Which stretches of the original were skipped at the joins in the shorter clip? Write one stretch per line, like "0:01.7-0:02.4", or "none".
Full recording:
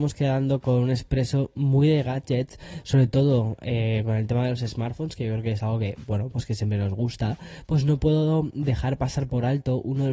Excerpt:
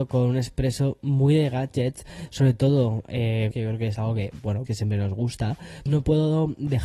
0:04.0-0:05.2
0:06.3-0:06.5
0:07.7-0:07.8

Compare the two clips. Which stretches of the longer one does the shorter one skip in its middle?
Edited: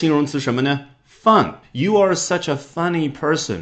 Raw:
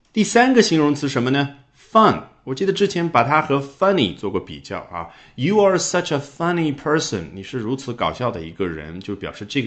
0:02.3-0:05.3

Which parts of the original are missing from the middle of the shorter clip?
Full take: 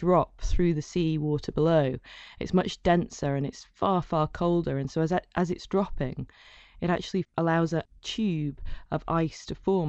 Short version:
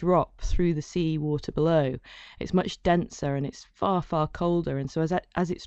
none

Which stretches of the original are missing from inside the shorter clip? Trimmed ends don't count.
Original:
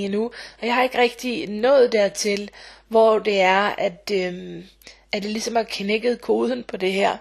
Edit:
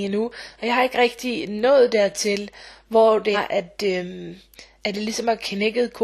0:03.3-0:03.6

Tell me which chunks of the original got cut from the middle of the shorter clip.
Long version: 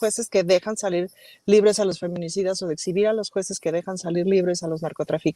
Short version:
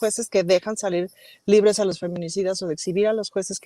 none

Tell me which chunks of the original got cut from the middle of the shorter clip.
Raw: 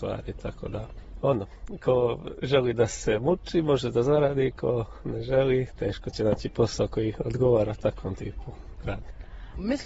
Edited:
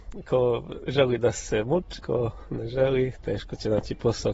0:03.5-0:04.5

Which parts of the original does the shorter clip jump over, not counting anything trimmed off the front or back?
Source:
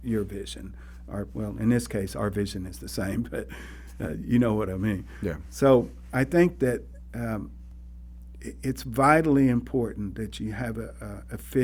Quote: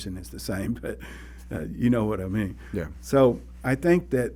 none

